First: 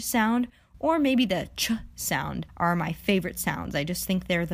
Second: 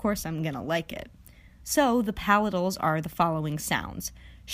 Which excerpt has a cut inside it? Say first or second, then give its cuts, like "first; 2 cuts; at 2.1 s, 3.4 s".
second; 1 cut; at 1.6 s